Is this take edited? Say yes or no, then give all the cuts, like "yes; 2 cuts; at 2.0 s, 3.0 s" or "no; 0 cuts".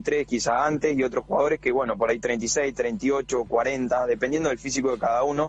no; 0 cuts